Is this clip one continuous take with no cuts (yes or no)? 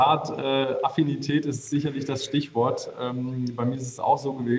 yes